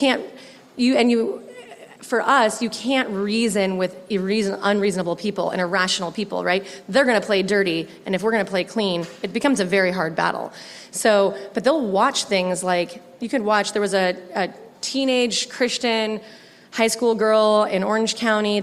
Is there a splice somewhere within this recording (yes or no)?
no